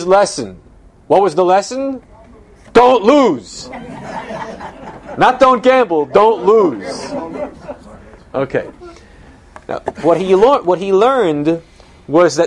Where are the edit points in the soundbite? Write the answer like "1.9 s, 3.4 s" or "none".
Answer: none